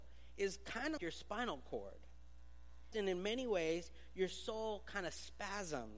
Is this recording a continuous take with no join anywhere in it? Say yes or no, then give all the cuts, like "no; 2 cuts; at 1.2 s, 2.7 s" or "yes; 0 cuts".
no; 2 cuts; at 1.0 s, 2.9 s